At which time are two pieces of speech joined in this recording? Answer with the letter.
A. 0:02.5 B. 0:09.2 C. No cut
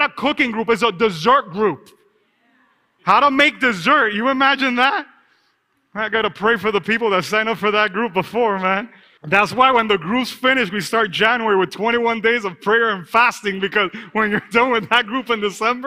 B